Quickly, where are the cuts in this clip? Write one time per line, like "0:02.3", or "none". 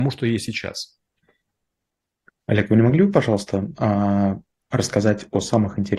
none